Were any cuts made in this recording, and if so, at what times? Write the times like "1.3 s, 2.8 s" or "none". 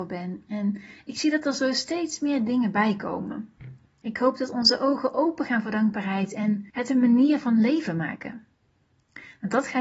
4.0 s, 6.7 s